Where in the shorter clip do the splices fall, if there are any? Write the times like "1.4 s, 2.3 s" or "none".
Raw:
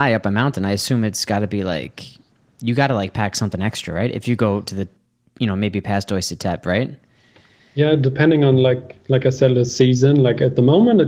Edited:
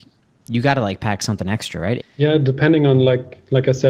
2.0 s